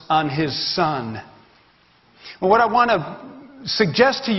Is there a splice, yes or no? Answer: yes